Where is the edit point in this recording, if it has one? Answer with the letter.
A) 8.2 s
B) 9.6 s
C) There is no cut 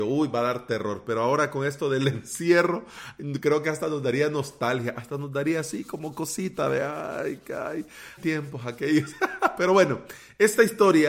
A